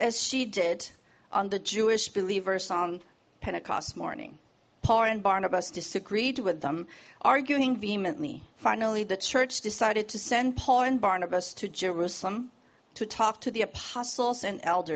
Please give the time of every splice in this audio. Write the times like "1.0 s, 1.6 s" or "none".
4.8 s, 8.5 s, 12.8 s

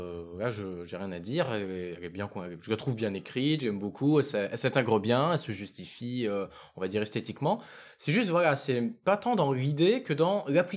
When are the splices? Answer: none

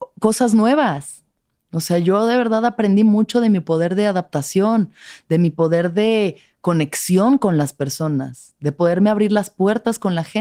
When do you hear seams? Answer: none

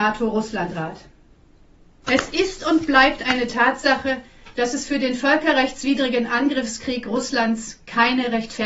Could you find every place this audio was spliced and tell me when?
2.0 s

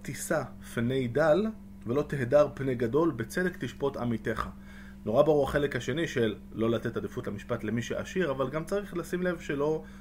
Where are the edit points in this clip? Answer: none

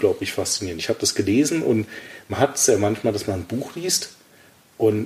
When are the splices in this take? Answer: none

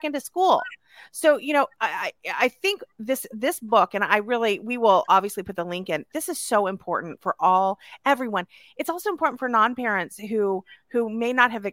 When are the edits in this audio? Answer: none

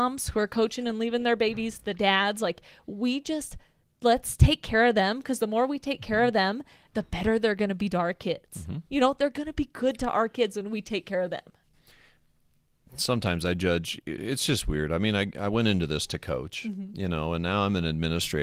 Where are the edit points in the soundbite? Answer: none

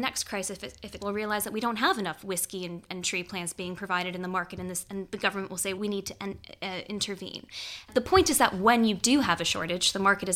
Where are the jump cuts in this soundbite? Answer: 1.0 s, 5.7 s

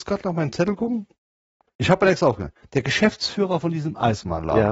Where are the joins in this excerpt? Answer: none

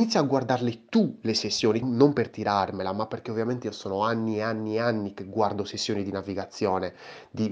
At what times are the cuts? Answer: 1.8 s

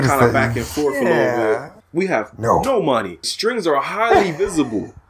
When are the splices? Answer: 1.8 s, 3.2 s

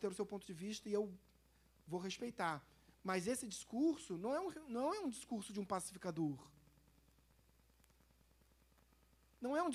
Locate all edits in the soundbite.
none

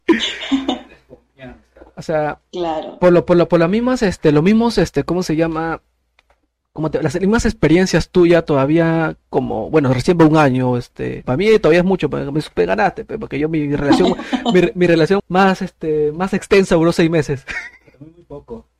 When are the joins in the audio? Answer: 11.2 s, 15.2 s

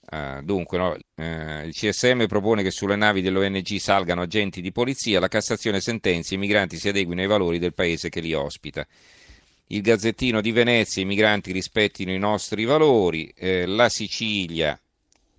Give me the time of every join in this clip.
1.0 s

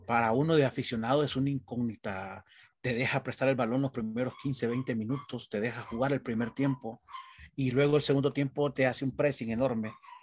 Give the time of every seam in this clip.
none

